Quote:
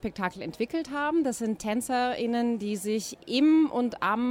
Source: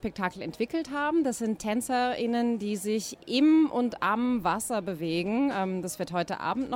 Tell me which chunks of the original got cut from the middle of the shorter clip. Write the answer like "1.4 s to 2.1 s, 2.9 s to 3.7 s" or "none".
none